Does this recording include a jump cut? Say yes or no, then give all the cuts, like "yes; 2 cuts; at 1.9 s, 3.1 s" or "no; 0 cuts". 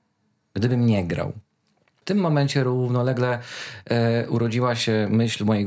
no; 0 cuts